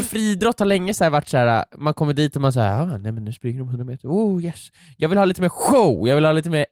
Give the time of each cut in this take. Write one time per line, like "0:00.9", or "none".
none